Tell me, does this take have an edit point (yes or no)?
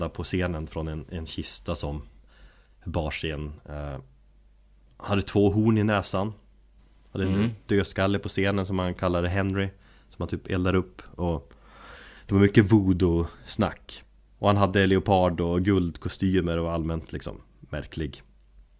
no